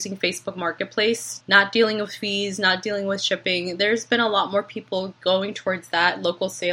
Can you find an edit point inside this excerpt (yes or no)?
yes